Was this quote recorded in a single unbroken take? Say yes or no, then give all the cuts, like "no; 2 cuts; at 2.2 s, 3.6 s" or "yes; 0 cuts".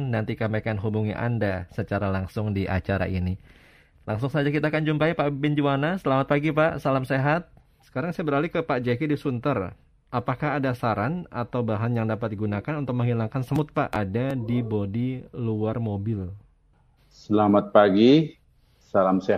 no; 2 cuts; at 7.8 s, 17.0 s